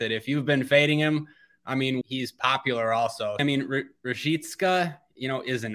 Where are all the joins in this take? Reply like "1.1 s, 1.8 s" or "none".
2.0 s, 3.4 s

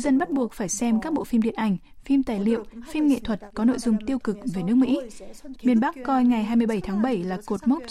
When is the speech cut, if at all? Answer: 5.5 s

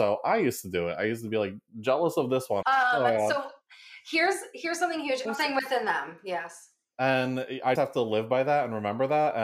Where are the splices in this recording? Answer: 2.6 s, 5.2 s, 7.7 s

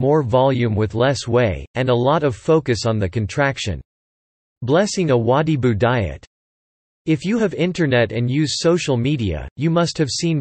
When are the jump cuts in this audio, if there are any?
none

